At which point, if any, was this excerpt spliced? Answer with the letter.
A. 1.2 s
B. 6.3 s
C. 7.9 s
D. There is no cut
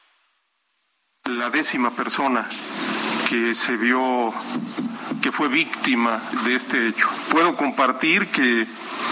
B